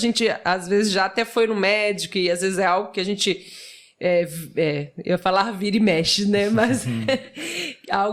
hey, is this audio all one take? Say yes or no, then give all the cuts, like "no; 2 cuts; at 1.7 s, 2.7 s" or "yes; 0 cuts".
yes; 0 cuts